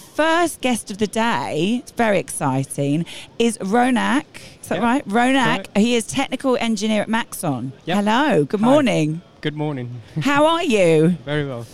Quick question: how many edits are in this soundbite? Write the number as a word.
one